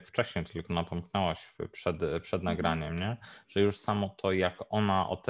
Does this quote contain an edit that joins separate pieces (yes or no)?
no